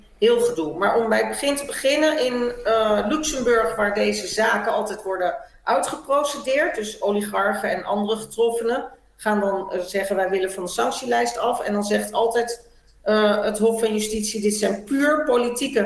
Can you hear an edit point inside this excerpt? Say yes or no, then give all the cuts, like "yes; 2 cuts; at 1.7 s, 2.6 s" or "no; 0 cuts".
no; 0 cuts